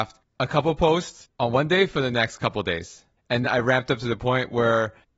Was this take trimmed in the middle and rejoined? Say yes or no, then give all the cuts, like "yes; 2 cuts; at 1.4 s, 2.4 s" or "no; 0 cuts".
yes; 1 cut; at 3.4 s